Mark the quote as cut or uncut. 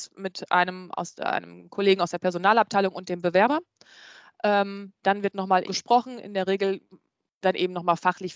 cut